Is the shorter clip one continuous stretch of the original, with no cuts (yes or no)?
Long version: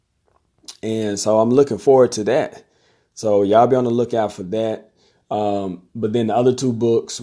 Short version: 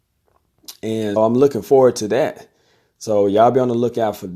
no